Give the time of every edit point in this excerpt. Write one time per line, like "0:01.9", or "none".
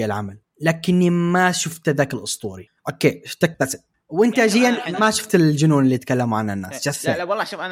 0:03.5